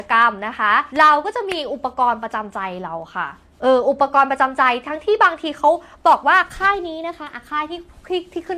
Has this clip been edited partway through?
yes; 1 cut; at 0.9 s

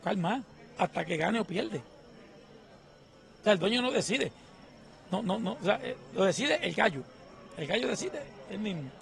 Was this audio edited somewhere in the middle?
no; 0 cuts

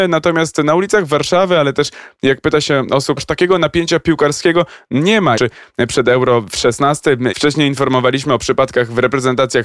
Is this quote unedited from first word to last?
no; 3 cuts; at 3.2 s, 5.3 s, 7.3 s

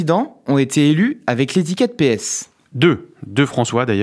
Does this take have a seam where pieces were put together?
no; 0 cuts

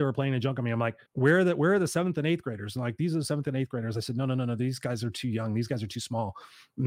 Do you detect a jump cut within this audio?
yes; 1 cut; at 1.1 s

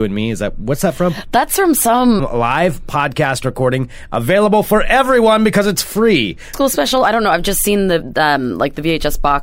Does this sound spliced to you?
yes; 2 cuts; at 2.2 s, 6.5 s

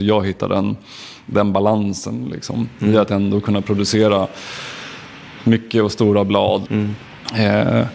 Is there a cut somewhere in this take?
yes; 1 cut; at 6.6 s

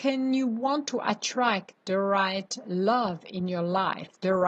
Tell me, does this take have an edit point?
no; 0 cuts

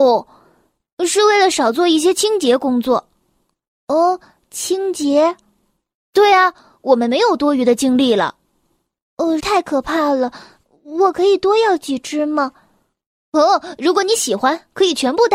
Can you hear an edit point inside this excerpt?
yes; 1 cut; at 9.4 s

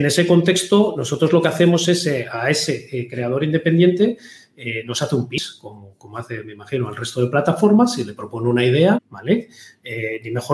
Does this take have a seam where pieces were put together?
yes; 1 cut; at 8.9 s

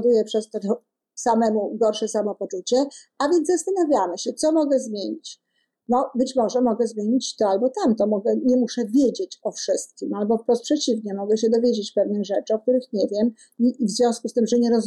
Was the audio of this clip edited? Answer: no; 0 cuts

